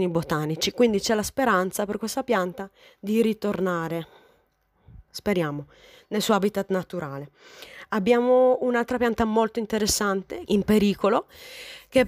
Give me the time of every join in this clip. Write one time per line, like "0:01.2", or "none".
0:10.5